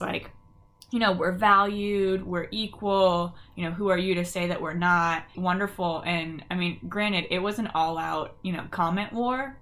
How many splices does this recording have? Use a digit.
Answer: 1